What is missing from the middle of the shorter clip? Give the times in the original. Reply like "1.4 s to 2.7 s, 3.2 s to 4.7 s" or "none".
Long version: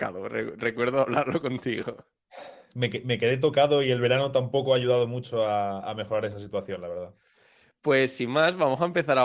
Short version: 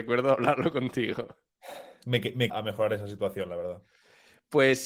3.2 s to 5.8 s